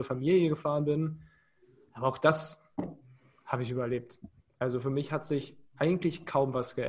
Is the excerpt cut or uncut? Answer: uncut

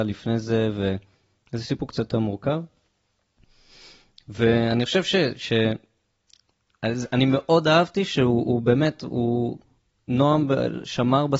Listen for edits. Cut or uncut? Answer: uncut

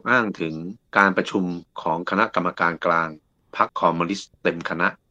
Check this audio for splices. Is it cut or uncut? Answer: cut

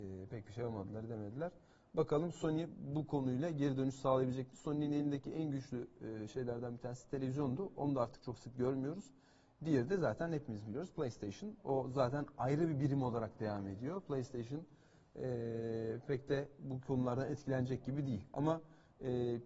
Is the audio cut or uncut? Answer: uncut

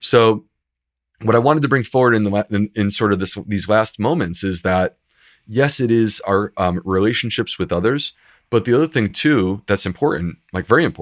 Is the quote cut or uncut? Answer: uncut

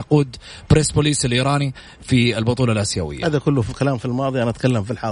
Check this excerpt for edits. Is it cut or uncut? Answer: uncut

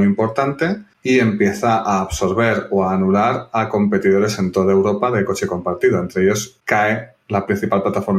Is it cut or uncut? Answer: uncut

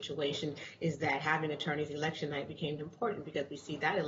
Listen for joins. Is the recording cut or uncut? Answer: cut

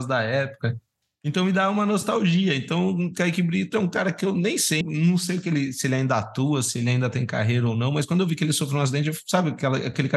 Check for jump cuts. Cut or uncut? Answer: cut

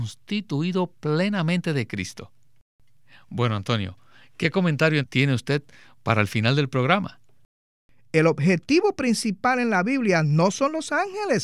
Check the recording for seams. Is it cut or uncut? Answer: cut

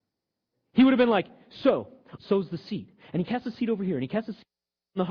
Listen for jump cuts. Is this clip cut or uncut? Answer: cut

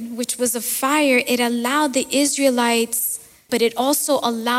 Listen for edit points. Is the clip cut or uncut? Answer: cut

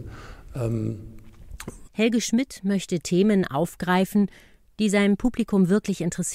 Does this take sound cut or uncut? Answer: cut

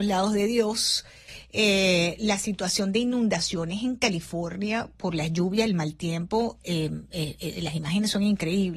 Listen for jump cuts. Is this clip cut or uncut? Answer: uncut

